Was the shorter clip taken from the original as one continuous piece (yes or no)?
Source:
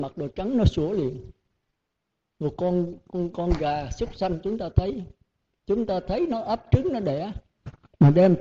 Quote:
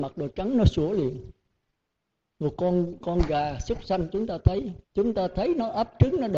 no